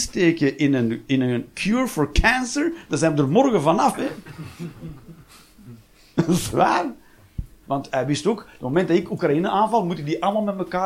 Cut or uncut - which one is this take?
cut